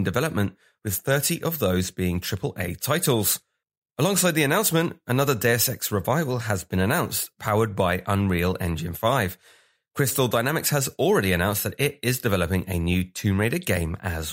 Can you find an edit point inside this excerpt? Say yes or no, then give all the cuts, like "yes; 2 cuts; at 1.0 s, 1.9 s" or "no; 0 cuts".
no; 0 cuts